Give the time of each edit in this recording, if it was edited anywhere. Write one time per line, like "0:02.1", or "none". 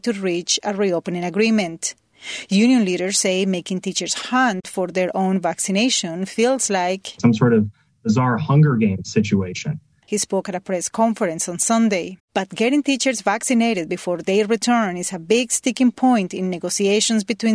0:10.0
0:12.2